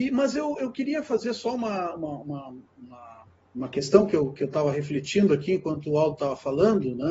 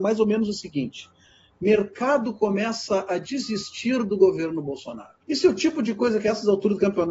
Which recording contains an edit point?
second; 1 cut; at 5.2 s

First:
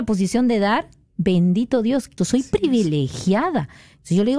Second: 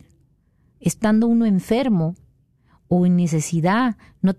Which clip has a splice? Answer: first; 1 cut; at 2.2 s

